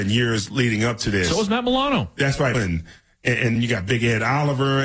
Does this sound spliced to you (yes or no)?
yes